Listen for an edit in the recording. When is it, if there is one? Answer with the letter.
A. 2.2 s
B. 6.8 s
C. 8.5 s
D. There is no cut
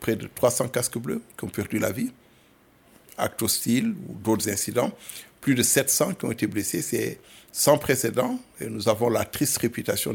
D